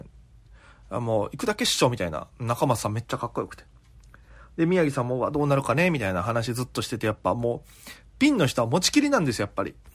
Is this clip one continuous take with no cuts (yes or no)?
yes